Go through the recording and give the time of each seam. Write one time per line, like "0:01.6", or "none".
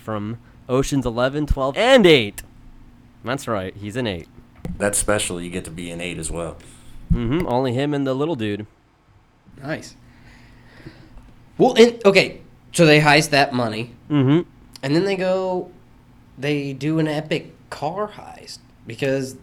0:01.7